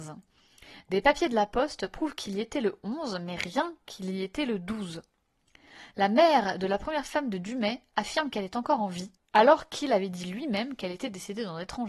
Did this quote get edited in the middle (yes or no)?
no